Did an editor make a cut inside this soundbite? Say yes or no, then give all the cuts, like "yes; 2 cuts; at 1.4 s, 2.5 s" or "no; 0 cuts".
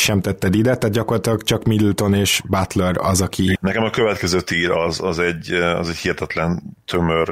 yes; 1 cut; at 3.6 s